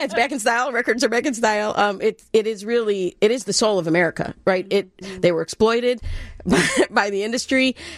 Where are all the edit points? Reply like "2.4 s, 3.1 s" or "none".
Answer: 5.0 s

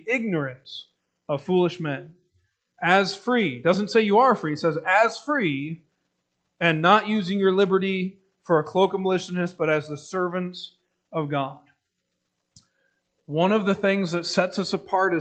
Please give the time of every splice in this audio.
none

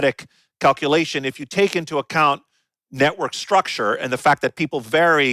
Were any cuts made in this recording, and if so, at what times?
none

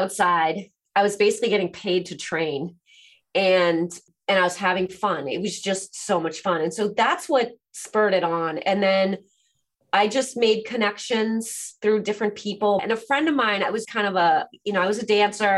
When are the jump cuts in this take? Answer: 12.8 s, 13.8 s

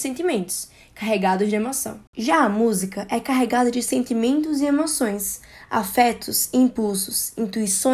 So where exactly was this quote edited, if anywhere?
none

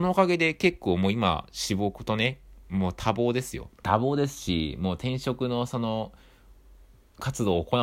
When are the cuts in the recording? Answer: 3.8 s

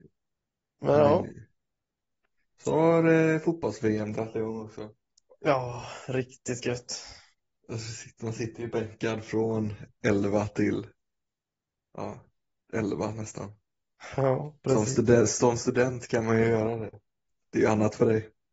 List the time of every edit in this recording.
none

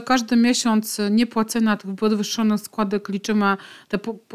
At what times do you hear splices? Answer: none

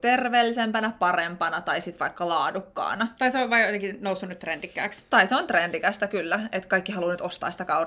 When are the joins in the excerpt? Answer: none

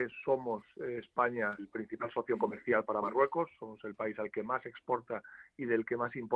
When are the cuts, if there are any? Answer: 1.6 s

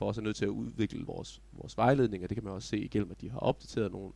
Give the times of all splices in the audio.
none

